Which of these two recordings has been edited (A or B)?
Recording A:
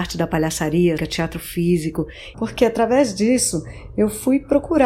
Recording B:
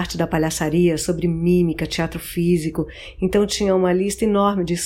A